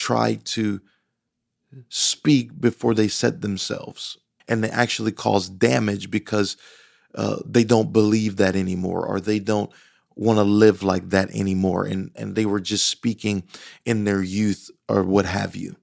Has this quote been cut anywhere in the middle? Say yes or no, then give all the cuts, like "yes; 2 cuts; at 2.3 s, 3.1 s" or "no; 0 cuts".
yes; 1 cut; at 4.4 s